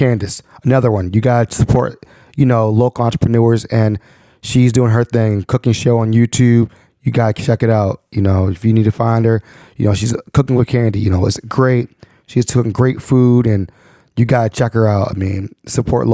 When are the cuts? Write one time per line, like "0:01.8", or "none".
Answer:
none